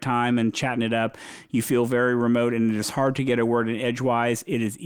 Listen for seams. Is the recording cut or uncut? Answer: uncut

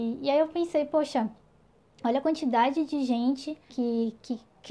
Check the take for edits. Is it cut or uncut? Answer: cut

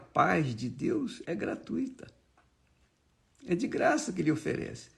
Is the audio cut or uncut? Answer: cut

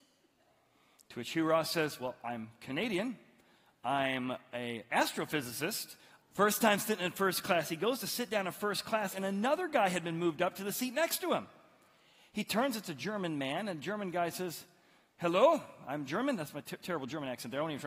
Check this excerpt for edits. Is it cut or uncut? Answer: cut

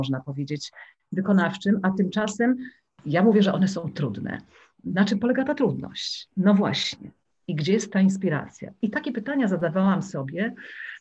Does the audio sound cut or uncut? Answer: uncut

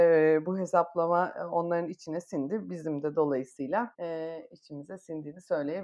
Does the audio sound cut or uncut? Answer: cut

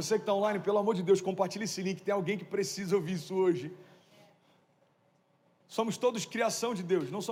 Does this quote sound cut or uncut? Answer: uncut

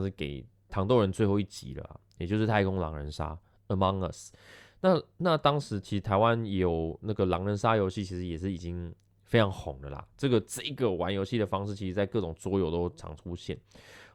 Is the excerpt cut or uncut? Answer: uncut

